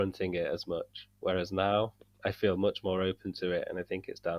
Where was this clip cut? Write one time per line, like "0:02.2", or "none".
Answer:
none